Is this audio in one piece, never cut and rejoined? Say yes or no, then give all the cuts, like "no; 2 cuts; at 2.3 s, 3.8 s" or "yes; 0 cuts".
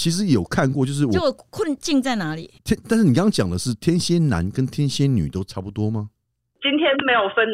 no; 1 cut; at 2.6 s